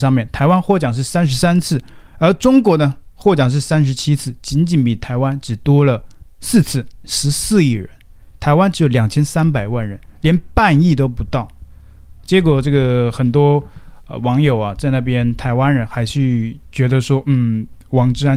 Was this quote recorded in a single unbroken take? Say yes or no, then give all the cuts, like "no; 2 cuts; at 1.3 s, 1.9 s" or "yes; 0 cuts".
no; 1 cut; at 7.0 s